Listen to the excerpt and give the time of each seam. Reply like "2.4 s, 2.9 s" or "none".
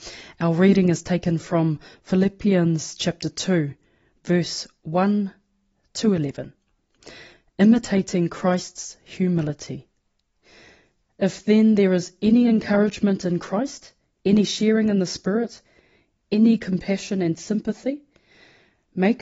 14.1 s